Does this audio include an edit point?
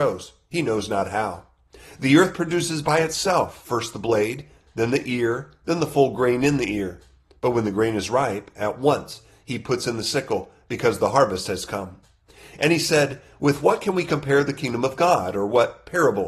no; 0 cuts

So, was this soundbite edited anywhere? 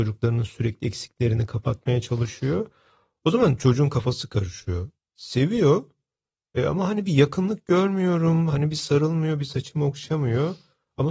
yes; 2 cuts; at 5.0 s, 9.4 s

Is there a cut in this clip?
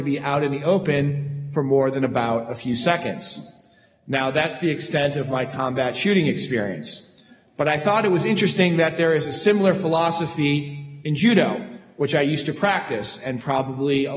no; 0 cuts

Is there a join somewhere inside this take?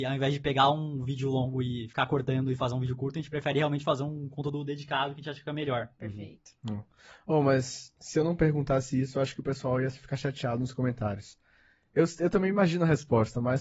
no; 0 cuts

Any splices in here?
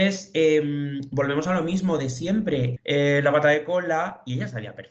yes; 1 cut; at 2.8 s

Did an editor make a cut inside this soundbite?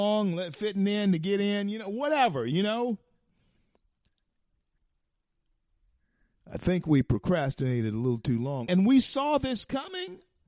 yes; 1 cut; at 8.7 s

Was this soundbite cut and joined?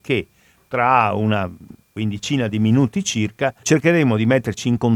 yes; 1 cut; at 3.6 s

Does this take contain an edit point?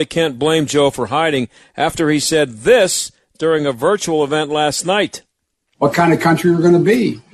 no; 0 cuts

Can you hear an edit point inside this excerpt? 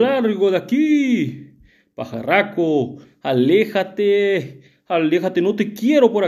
no; 0 cuts

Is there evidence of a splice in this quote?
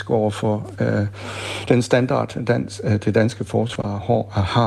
no; 0 cuts

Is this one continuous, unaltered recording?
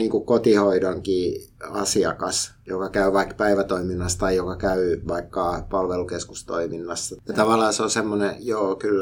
no; 1 cut; at 7.2 s

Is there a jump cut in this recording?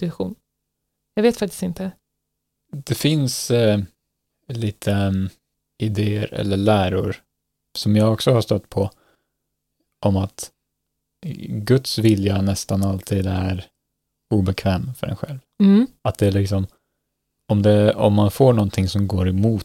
no; 0 cuts

